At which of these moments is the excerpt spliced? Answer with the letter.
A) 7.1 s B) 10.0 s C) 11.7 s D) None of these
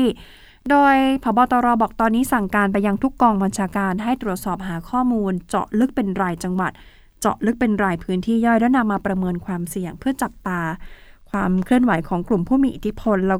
D